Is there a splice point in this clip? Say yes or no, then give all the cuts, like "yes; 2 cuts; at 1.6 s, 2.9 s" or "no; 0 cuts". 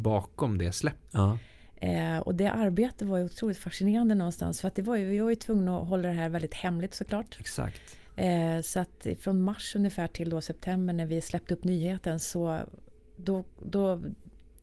yes; 1 cut; at 1.1 s